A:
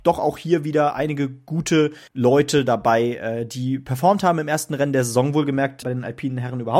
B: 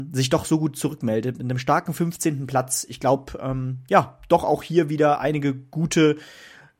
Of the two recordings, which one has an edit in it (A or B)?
A